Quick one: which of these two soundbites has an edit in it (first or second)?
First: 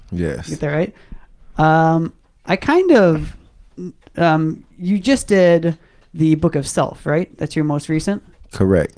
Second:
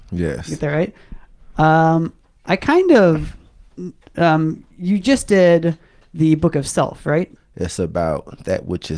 second